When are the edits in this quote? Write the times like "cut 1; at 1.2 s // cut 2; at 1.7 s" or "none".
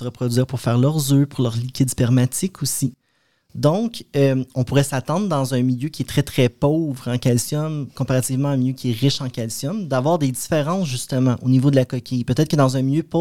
none